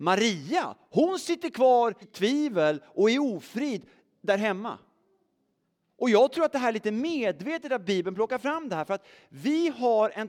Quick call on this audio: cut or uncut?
cut